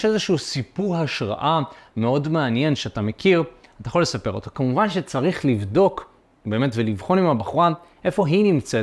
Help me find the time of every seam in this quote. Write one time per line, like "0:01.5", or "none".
none